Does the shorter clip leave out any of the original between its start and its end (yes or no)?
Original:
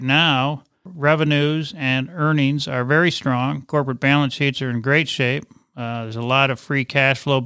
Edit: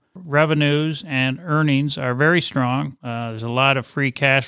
yes